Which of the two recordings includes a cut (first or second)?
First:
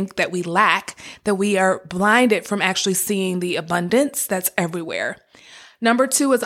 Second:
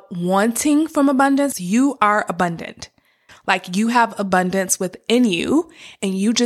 second